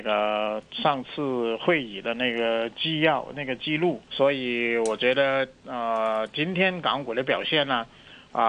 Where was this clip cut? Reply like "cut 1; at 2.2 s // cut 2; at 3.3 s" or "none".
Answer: cut 1; at 4.1 s